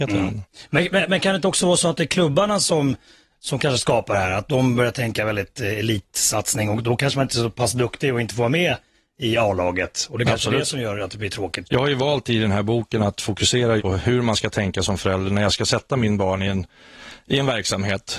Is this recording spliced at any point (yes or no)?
yes